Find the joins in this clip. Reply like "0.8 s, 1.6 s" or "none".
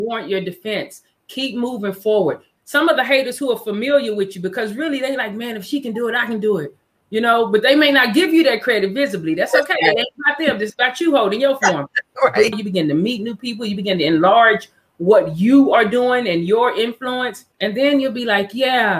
2.6 s, 12.5 s, 17.5 s